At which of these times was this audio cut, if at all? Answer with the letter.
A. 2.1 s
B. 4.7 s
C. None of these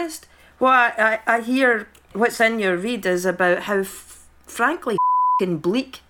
A